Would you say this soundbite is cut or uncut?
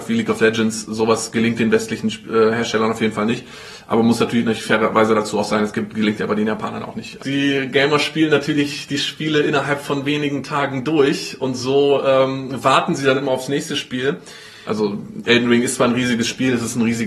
cut